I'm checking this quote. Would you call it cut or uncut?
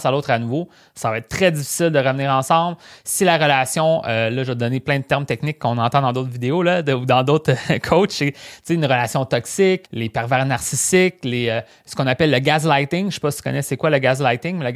cut